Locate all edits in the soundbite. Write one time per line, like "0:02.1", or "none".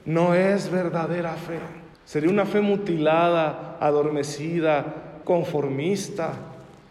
0:01.9
0:05.2